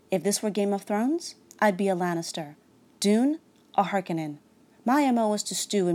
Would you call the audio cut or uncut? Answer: cut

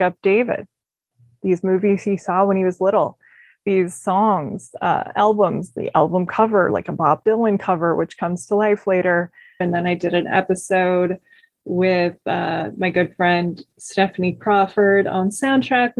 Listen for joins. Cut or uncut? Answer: cut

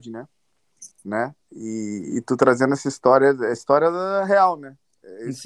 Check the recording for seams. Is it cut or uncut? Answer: cut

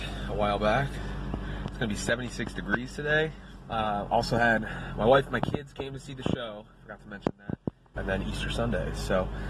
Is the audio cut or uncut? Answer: cut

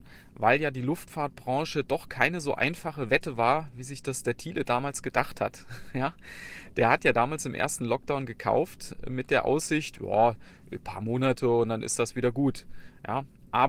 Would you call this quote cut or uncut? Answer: uncut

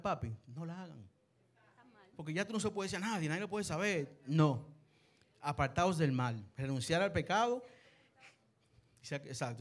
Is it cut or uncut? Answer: cut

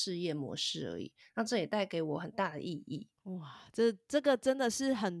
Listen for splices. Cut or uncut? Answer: cut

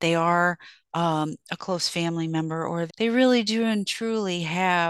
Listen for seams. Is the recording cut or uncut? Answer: cut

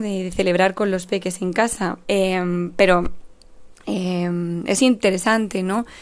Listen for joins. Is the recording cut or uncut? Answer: cut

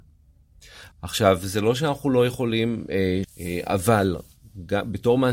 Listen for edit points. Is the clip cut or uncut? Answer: cut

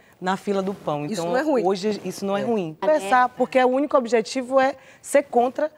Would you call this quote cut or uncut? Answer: cut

